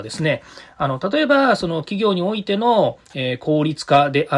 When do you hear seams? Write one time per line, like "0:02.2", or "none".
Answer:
none